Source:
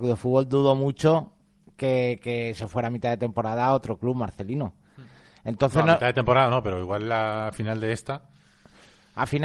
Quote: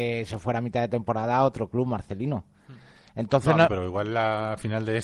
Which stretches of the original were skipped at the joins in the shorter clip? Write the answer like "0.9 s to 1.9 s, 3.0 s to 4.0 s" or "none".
6.0 s to 6.6 s